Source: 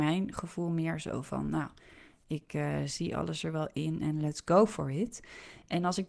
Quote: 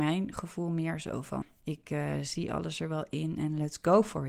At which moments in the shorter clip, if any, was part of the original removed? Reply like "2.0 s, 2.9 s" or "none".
1.4 s